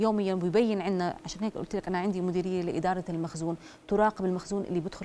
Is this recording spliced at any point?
no; 0 cuts

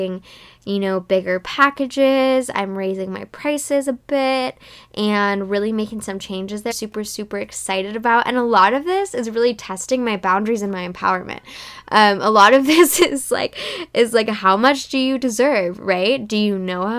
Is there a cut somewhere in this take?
yes; 1 cut; at 6.7 s

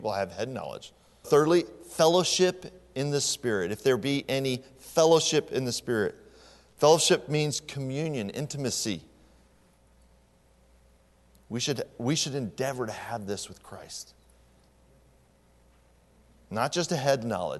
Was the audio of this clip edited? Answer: yes; 1 cut; at 1.2 s

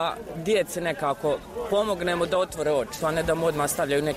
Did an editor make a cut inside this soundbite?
yes; 1 cut; at 3.0 s

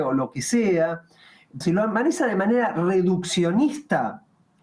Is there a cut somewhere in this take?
yes; 1 cut; at 1.6 s

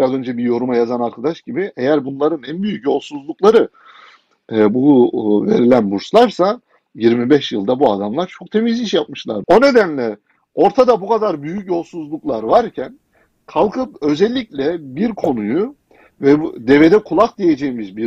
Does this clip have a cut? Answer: yes; 1 cut; at 9.4 s

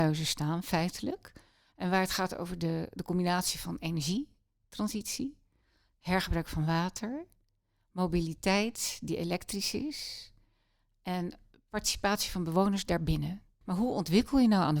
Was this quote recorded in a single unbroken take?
no; 1 cut; at 13.6 s

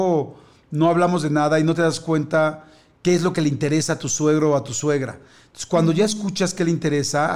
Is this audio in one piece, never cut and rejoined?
yes; 0 cuts

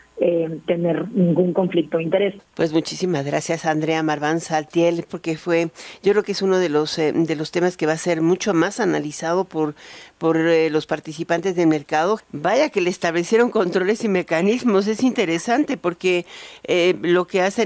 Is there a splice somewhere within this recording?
yes; 3 cuts; at 2.4 s, 5.1 s, 12.2 s

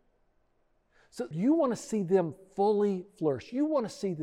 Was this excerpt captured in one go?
no; 1 cut; at 1.3 s

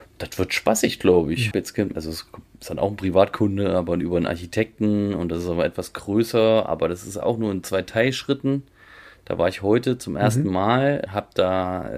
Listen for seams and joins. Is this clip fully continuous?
no; 2 cuts; at 1.5 s, 11.1 s

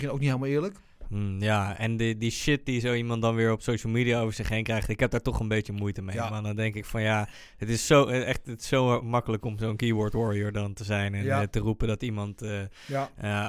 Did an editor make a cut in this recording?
no; 0 cuts

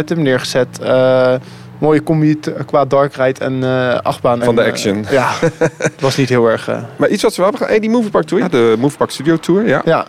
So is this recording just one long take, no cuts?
no; 2 cuts; at 4.4 s, 8.4 s

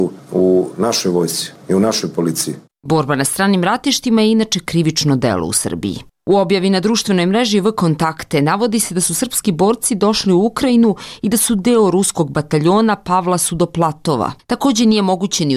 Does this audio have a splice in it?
yes; 1 cut; at 14.4 s

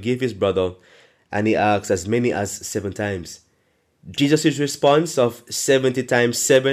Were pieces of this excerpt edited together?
no; 0 cuts

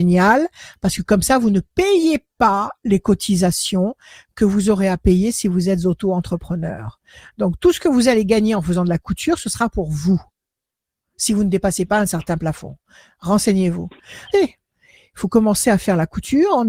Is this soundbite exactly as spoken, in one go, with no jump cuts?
no; 1 cut; at 14.3 s

